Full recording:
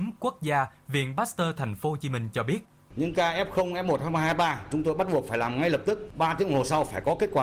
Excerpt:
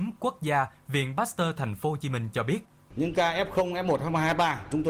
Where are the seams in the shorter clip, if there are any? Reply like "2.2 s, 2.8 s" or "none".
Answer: none